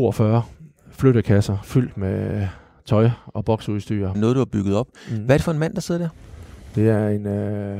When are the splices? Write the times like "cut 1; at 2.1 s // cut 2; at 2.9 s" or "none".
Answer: cut 1; at 4.1 s